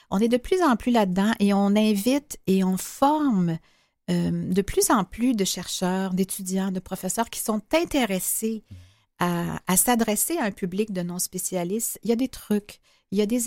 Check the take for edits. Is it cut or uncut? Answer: uncut